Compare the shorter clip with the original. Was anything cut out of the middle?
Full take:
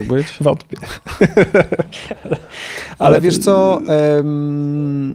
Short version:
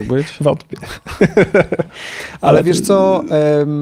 yes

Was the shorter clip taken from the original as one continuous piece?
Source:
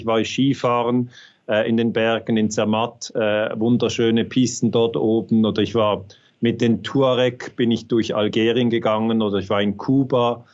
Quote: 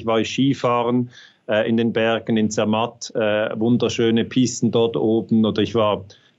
yes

